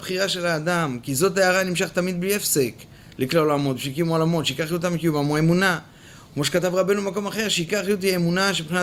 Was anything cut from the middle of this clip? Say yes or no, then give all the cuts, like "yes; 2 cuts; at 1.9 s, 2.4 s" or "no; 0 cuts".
no; 0 cuts